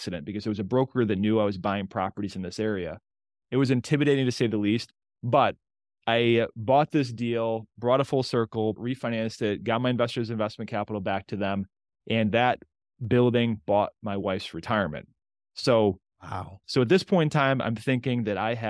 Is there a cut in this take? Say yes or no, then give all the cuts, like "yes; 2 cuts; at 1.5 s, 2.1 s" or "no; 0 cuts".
yes; 3 cuts; at 5.0 s, 8.8 s, 16.6 s